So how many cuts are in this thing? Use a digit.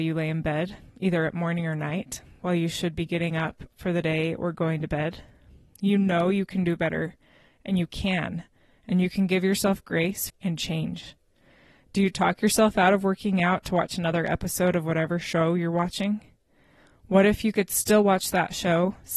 1